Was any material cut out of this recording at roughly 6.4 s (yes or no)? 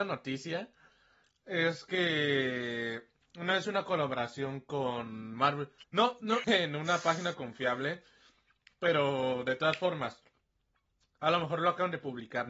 yes